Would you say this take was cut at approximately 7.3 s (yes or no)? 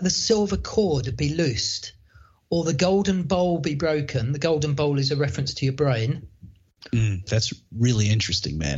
yes